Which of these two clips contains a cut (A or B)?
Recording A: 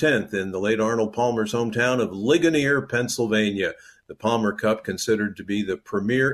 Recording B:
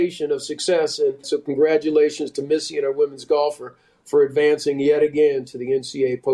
B